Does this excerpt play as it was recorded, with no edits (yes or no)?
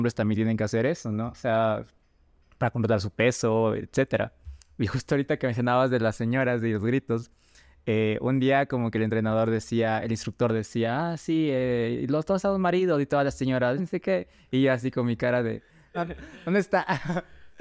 no